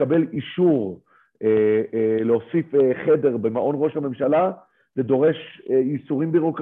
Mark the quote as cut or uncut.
uncut